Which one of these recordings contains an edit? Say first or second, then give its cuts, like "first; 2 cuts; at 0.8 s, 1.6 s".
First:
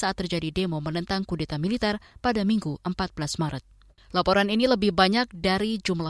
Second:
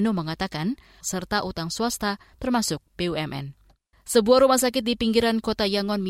second; 2 cuts; at 1.0 s, 3.9 s